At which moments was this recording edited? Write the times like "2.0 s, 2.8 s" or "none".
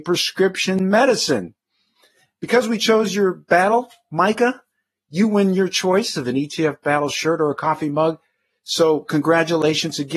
none